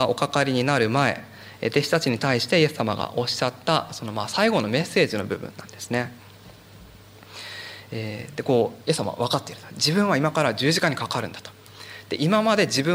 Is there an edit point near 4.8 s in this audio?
no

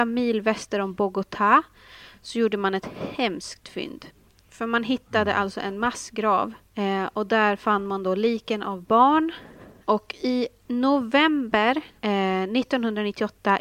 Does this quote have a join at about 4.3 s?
no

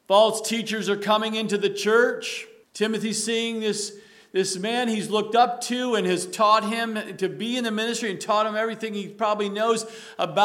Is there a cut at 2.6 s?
yes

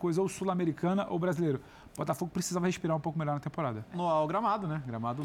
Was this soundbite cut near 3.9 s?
yes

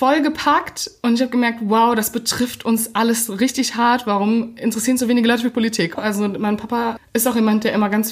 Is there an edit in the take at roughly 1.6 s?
no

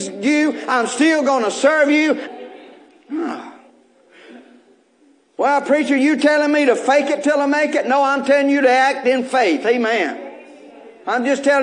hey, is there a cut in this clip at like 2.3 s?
yes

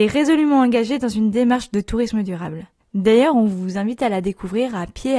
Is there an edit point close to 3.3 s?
no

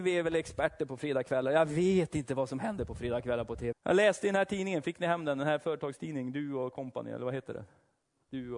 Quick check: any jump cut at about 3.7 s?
yes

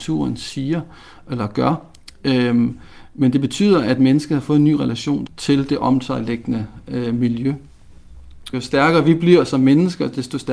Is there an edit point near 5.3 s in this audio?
yes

